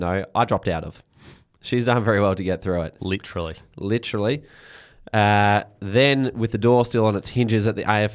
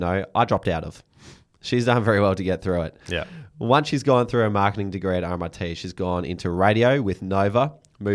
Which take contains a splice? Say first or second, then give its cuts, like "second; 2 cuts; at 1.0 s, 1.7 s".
first; 1 cut; at 3.0 s